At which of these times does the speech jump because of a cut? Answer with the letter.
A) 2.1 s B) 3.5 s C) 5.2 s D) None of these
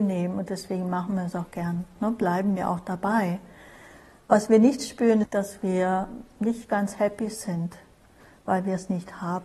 C